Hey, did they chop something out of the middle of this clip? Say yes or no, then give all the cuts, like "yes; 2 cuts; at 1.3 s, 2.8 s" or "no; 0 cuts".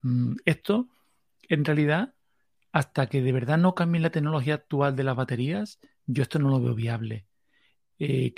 no; 0 cuts